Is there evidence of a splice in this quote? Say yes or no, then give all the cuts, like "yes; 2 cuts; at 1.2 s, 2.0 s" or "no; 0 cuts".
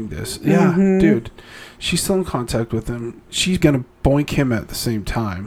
yes; 1 cut; at 3.6 s